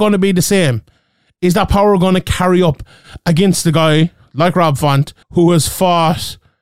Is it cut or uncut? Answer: cut